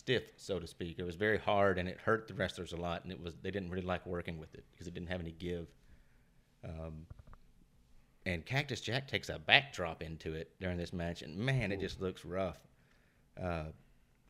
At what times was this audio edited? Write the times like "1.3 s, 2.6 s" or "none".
none